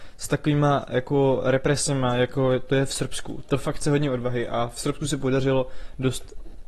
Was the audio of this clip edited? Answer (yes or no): yes